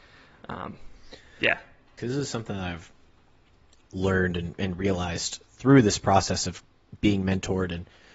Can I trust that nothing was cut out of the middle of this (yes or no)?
no